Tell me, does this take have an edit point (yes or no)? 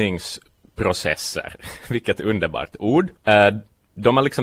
yes